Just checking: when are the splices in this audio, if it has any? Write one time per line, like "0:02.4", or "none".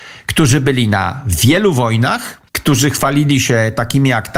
0:02.5